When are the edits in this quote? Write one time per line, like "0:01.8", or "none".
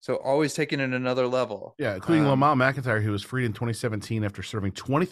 none